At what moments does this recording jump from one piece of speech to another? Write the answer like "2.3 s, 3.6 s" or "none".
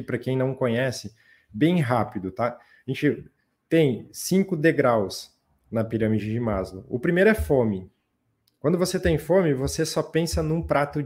none